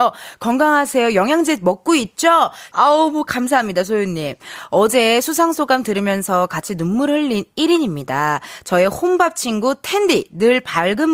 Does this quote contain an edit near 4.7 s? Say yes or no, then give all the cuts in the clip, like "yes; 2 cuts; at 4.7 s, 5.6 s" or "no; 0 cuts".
no; 1 cut; at 2.7 s